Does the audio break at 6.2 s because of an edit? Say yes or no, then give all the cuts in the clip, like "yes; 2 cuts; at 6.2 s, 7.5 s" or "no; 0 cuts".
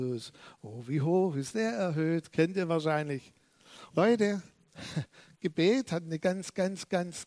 yes; 2 cuts; at 3.9 s, 6.2 s